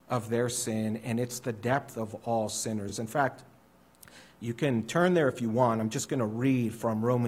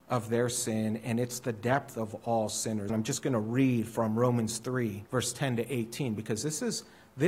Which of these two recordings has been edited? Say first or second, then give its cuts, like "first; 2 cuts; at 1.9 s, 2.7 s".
second; 2 cuts; at 2.9 s, 5.1 s